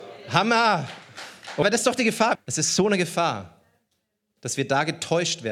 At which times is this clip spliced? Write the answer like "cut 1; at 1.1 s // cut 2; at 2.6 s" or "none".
cut 1; at 2.3 s